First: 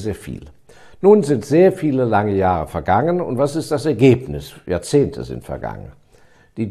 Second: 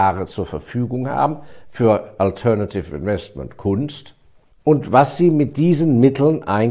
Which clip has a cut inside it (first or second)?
second